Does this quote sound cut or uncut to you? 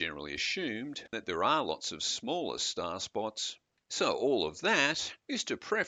cut